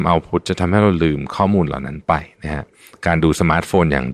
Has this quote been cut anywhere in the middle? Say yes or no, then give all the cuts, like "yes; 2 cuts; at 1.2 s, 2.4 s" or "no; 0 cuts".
no; 0 cuts